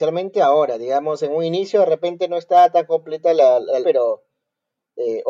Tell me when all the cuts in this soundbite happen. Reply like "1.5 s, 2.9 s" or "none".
3.8 s